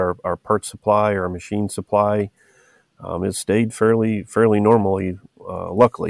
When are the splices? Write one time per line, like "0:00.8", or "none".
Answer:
none